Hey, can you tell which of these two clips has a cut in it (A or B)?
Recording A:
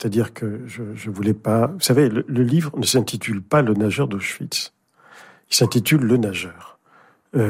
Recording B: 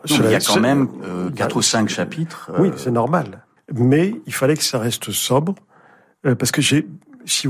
B